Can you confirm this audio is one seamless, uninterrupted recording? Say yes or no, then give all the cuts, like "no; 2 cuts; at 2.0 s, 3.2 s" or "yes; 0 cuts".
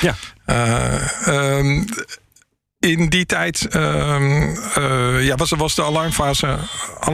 yes; 0 cuts